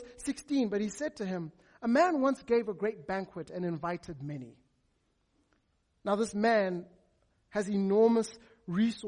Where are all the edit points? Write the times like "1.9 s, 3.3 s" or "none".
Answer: none